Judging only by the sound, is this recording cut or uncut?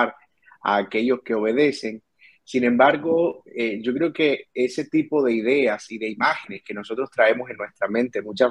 uncut